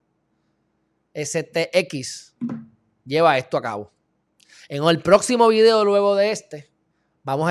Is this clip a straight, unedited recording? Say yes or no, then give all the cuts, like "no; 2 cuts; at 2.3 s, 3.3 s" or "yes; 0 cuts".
yes; 0 cuts